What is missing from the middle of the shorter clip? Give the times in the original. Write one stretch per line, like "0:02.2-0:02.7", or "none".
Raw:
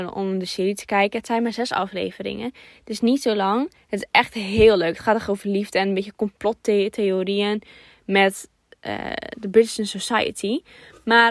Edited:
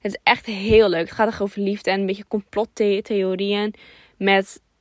none